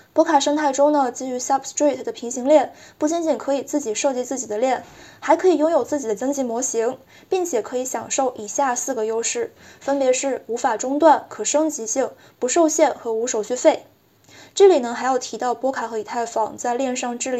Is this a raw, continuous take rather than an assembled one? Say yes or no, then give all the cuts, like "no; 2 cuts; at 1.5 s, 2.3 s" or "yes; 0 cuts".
yes; 0 cuts